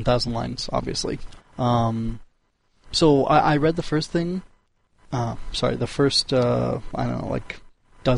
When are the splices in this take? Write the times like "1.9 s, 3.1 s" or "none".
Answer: 1.4 s